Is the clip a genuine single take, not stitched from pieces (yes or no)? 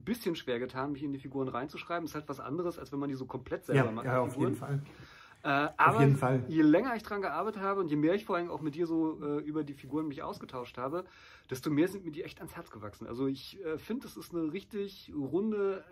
yes